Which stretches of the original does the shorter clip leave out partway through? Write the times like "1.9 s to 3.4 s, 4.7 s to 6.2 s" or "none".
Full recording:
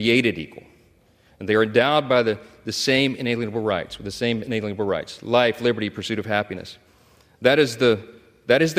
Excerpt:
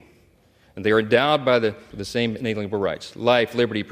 2.5 s to 4.0 s